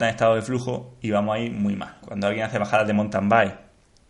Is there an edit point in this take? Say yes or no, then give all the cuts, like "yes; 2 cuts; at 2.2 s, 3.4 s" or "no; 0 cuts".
yes; 1 cut; at 2.0 s